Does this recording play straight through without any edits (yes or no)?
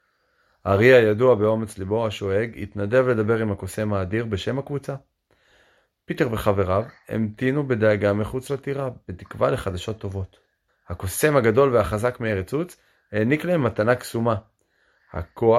no